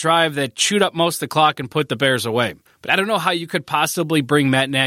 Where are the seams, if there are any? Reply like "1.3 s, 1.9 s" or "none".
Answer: 2.7 s